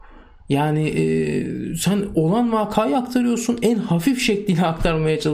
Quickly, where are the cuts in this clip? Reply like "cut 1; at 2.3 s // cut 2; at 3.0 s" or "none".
none